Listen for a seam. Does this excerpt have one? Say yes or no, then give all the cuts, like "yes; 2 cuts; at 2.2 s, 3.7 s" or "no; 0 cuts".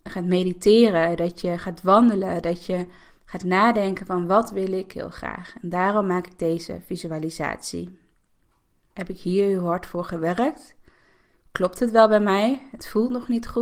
yes; 1 cut; at 8.9 s